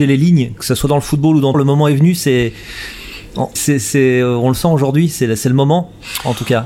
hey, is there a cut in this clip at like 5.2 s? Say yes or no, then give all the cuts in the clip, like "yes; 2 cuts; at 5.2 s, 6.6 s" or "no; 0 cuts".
no; 2 cuts; at 1.5 s, 3.6 s